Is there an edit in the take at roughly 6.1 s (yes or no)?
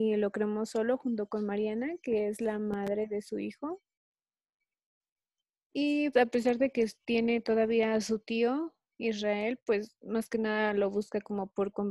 yes